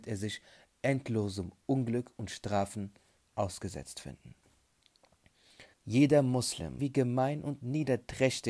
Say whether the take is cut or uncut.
cut